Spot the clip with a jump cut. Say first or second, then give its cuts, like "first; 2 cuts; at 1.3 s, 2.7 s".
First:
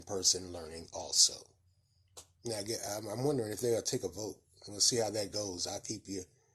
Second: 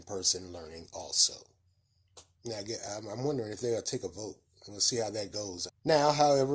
second; 1 cut; at 5.7 s